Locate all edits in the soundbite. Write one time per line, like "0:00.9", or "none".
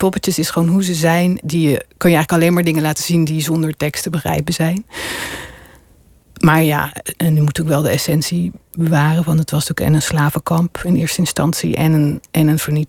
0:01.4